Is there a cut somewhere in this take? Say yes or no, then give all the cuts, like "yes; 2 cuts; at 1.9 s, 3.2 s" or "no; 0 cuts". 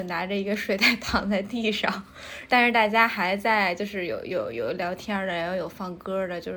no; 0 cuts